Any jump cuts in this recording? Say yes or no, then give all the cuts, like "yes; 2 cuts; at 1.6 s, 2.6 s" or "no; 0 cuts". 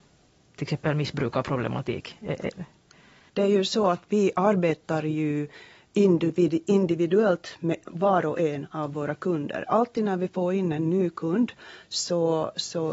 yes; 1 cut; at 3.3 s